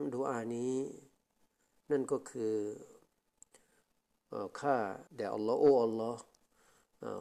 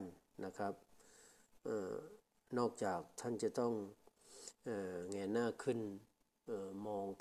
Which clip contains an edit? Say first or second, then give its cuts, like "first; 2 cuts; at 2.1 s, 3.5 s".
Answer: first; 1 cut; at 5.1 s